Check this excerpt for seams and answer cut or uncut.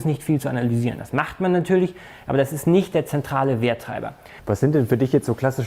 cut